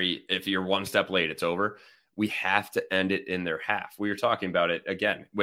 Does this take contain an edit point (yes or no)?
no